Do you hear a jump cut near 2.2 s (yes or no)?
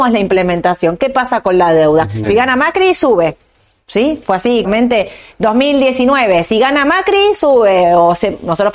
yes